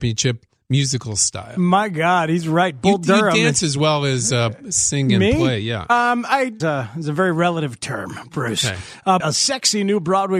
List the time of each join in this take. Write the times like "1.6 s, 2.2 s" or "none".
6.6 s, 9.2 s